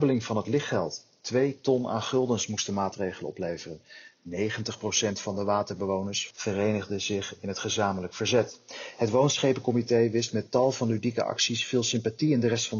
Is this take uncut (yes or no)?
no